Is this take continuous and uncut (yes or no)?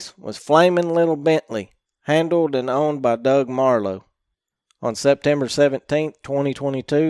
yes